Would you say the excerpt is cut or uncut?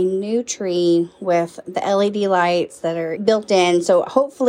cut